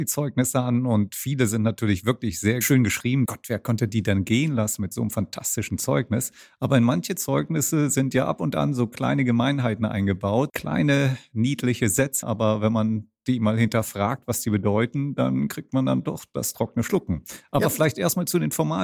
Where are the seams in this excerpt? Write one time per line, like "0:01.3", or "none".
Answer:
0:03.3
0:10.5
0:12.2